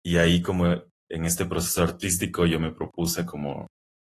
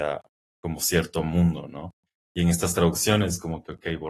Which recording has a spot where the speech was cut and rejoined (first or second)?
second